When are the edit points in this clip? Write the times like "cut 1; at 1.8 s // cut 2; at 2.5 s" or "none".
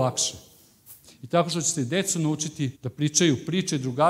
cut 1; at 1.0 s // cut 2; at 2.7 s